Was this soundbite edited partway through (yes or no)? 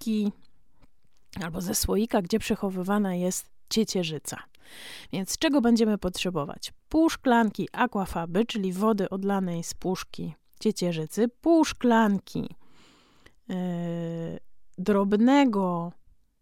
no